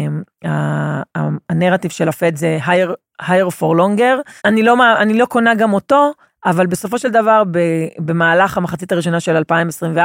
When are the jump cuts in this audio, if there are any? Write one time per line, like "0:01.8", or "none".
0:04.4